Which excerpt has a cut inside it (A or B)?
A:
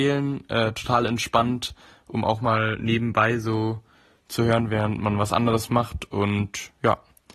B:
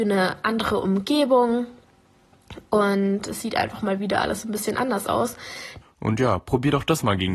B